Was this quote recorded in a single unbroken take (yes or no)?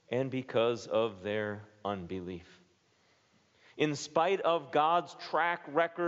yes